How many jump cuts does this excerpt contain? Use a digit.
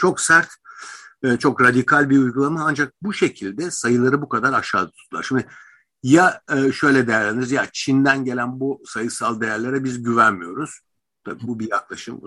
0